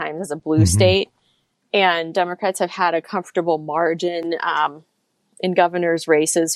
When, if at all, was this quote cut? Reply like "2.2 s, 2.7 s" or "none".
none